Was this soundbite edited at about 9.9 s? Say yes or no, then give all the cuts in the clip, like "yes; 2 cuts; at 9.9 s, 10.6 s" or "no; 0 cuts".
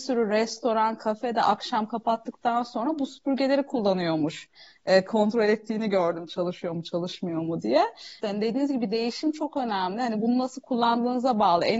no; 2 cuts; at 5.1 s, 8.2 s